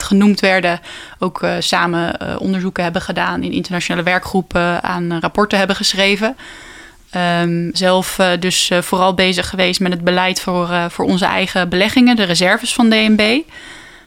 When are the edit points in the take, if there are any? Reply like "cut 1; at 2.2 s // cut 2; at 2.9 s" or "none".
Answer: cut 1; at 7.7 s